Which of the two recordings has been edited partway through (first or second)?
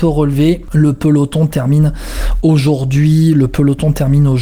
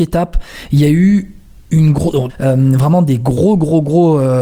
second